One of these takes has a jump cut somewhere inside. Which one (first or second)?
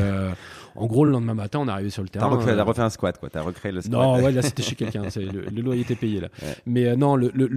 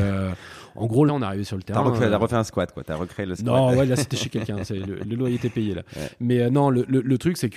second